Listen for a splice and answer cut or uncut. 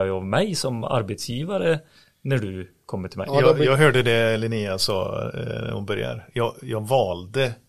cut